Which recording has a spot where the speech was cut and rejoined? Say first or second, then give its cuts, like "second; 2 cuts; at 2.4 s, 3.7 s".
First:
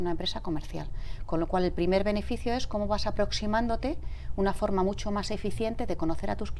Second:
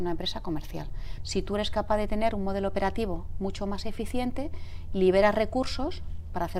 second; 1 cut; at 1.2 s